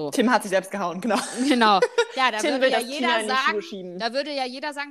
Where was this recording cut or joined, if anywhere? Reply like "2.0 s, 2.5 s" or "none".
none